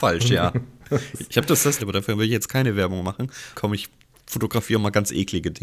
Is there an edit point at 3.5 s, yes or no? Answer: yes